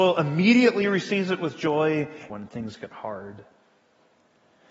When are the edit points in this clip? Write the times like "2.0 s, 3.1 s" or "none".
2.3 s